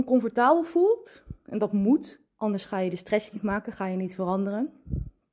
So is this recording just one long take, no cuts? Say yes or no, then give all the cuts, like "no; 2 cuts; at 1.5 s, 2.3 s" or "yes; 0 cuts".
no; 1 cut; at 2.3 s